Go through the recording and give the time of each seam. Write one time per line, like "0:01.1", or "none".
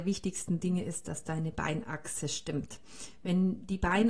none